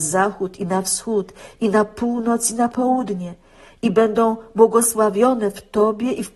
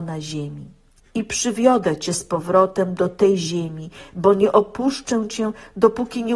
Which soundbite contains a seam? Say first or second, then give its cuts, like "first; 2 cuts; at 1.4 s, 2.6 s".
second; 1 cut; at 1.0 s